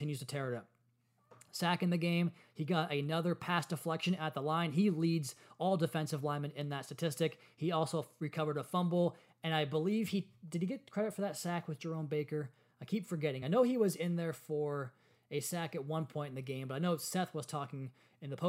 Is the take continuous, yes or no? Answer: yes